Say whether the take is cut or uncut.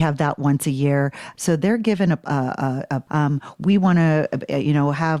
cut